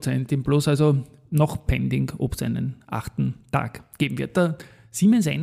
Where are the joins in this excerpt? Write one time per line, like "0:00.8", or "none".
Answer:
none